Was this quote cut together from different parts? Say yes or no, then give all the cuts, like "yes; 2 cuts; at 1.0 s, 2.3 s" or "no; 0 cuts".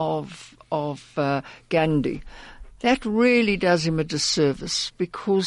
no; 0 cuts